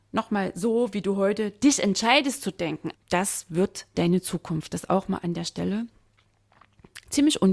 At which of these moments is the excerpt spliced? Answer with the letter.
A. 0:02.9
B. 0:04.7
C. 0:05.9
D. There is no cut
A